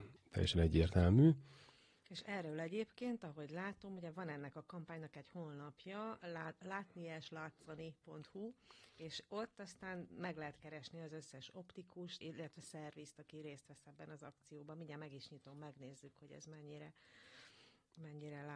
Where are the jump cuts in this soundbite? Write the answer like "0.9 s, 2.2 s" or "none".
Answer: 12.2 s